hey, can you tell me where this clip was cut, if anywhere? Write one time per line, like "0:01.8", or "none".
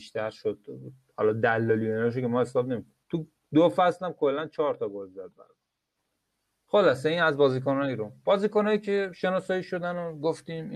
0:03.0